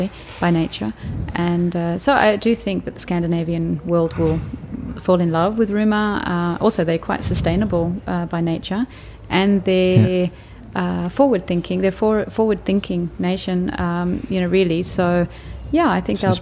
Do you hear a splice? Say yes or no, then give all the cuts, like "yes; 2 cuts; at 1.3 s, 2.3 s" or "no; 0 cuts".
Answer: no; 0 cuts